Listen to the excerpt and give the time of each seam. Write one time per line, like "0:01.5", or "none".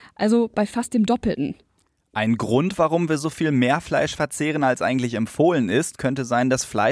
none